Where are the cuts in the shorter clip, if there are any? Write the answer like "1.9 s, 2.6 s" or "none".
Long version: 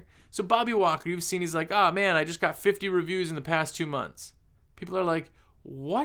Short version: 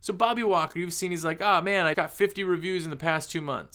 1.9 s